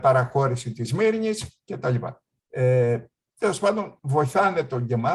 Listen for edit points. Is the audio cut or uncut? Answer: cut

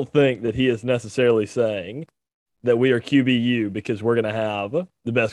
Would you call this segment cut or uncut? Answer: uncut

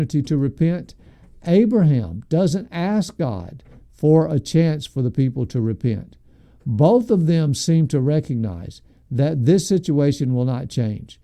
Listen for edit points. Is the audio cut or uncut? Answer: uncut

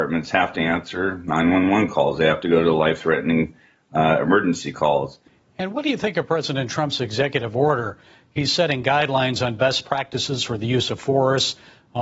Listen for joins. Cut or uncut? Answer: uncut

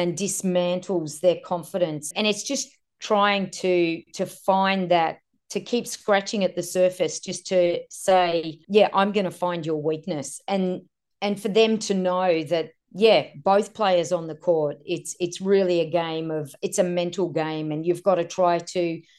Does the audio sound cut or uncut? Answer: cut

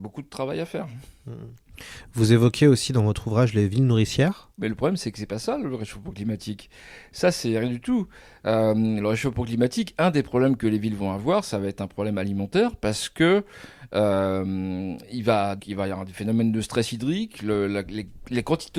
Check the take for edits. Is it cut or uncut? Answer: cut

